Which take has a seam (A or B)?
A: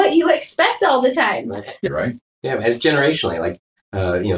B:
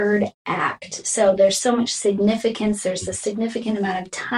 A